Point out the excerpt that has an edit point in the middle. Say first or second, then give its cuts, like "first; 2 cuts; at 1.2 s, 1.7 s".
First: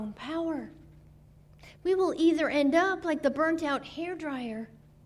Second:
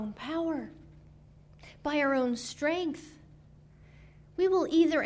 first; 1 cut; at 1.7 s